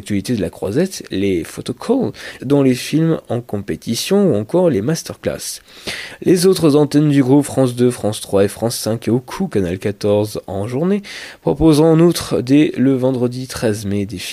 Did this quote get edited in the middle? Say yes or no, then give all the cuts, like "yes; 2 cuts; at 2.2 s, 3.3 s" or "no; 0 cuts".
yes; 1 cut; at 2.4 s